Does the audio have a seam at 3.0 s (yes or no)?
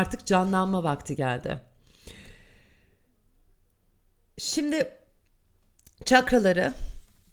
no